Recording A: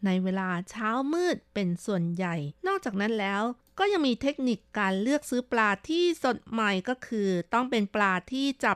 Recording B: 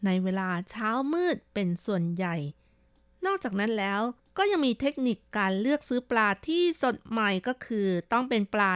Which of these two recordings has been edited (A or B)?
A